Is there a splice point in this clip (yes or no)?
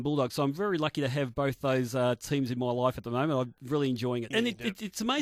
yes